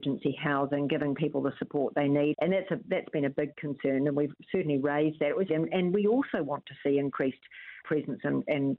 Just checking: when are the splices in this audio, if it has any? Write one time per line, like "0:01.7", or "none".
0:02.3
0:05.5
0:07.8